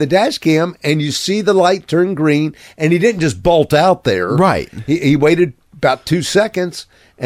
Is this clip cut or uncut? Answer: uncut